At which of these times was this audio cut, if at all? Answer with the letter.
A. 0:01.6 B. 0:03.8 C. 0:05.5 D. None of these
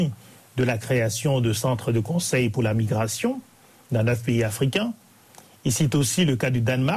D